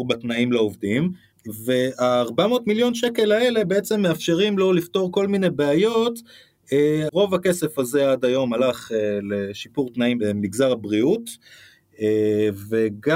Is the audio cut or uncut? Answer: cut